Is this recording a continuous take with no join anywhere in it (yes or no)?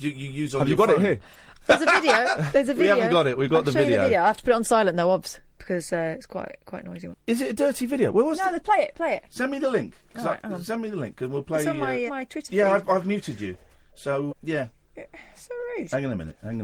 no